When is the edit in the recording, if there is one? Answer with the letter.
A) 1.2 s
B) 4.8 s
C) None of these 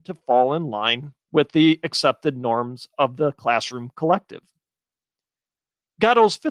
A